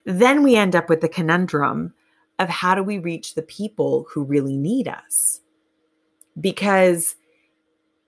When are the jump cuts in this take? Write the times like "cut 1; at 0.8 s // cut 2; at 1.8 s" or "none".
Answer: none